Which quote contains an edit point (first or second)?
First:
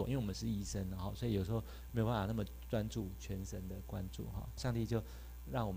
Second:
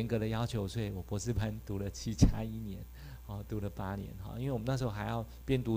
first